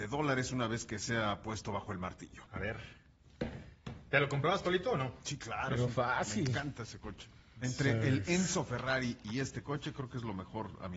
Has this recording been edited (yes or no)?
yes